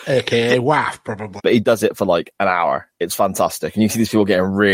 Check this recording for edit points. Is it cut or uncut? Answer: cut